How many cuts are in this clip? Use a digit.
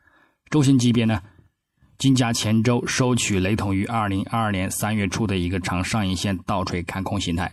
0